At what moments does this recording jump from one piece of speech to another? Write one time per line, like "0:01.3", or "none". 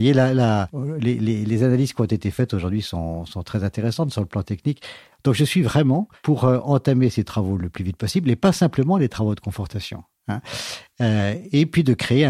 0:05.1